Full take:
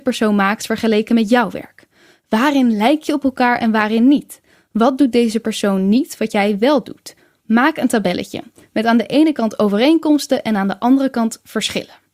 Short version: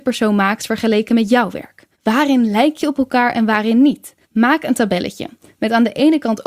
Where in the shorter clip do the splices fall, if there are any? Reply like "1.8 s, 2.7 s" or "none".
1.9 s, 4.2 s